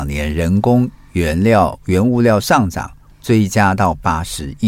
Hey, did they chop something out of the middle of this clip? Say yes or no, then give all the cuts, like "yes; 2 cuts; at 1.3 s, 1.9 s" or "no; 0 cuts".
no; 0 cuts